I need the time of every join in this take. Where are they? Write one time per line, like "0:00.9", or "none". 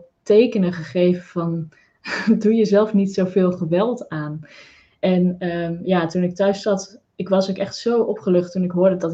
none